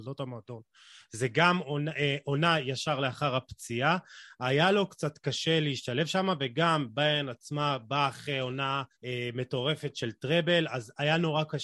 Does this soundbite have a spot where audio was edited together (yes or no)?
yes